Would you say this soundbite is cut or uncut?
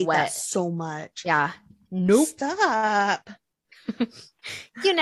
uncut